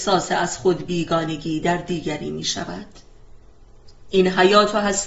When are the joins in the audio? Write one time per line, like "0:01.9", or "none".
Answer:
0:04.1